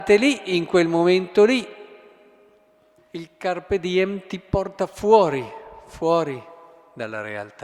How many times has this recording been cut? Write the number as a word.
one